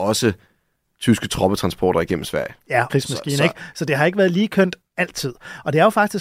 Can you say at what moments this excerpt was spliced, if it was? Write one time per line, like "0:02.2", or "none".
0:02.9